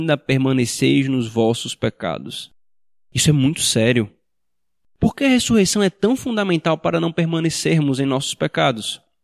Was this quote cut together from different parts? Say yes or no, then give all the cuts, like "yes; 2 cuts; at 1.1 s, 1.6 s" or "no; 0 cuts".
no; 0 cuts